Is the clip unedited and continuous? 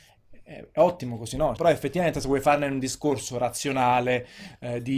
no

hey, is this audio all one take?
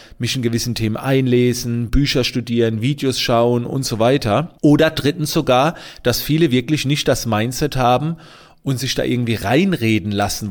no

